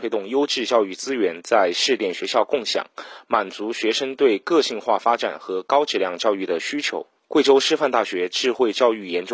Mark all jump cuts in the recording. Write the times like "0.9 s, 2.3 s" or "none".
7.2 s